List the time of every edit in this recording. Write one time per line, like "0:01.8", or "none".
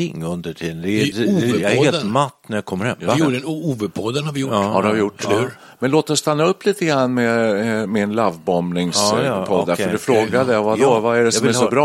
0:01.1

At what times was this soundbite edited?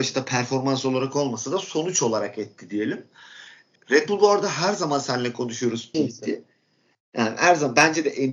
0:03.8
0:05.9

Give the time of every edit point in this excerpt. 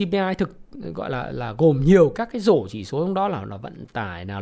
none

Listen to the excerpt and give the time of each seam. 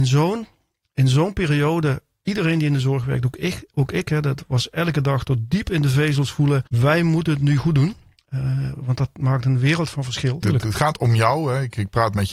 0:06.7
0:10.4

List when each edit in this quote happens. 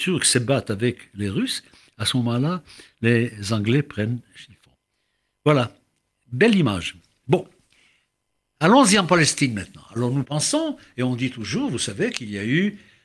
0:10.2

